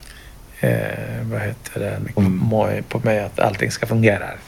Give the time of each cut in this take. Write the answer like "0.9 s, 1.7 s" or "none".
2.2 s